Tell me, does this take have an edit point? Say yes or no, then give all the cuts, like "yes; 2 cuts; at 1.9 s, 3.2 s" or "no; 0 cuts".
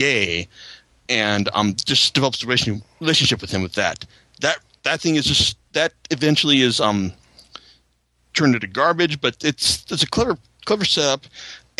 no; 0 cuts